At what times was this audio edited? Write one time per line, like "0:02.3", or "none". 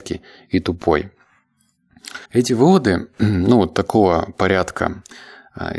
0:02.2